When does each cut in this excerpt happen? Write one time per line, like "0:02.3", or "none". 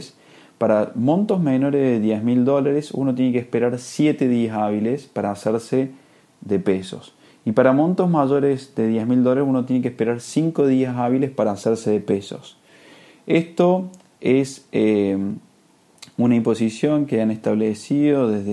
none